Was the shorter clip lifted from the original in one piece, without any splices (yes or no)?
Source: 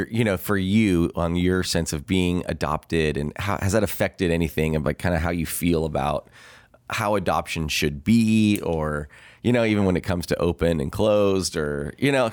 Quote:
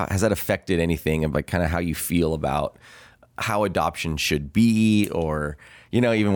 yes